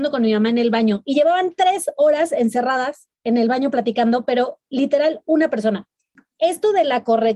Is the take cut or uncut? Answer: uncut